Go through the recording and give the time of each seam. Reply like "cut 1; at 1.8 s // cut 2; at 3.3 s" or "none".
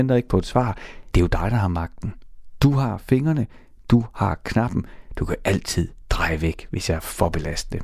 cut 1; at 1.1 s